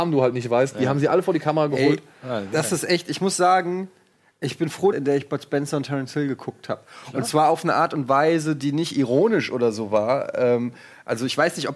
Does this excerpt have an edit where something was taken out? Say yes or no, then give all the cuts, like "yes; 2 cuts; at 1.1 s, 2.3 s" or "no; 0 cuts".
yes; 1 cut; at 4.9 s